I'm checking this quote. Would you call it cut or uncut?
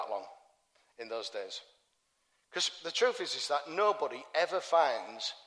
cut